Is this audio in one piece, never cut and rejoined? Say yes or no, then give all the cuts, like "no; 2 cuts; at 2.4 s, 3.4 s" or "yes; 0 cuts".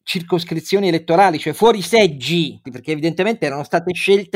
no; 1 cut; at 2.6 s